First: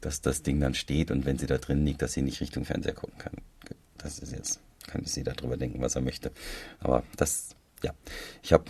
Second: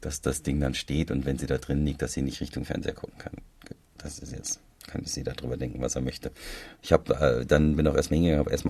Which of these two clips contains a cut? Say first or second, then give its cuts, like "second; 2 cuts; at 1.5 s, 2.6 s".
second; 1 cut; at 6.8 s